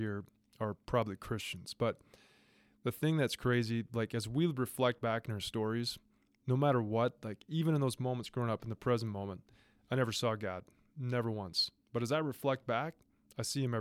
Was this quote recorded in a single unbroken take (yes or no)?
yes